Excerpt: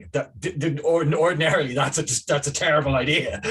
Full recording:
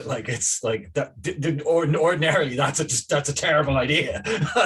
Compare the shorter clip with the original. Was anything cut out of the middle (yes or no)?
no